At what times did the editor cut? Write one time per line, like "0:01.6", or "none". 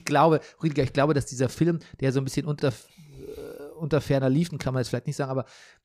none

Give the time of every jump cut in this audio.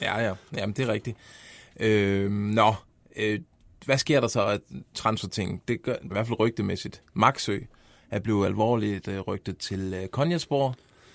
0:06.1

